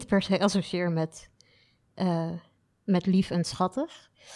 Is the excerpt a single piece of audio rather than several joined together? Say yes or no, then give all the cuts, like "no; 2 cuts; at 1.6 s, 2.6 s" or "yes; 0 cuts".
yes; 0 cuts